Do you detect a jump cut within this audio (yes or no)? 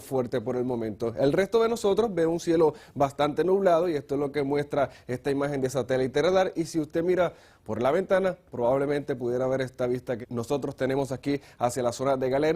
yes